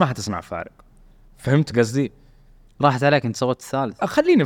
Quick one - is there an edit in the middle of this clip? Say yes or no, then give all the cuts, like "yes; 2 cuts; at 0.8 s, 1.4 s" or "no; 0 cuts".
no; 0 cuts